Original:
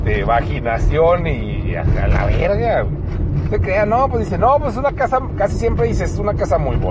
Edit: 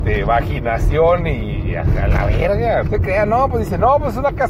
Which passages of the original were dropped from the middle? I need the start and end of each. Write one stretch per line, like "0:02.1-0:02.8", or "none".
0:02.8-0:03.4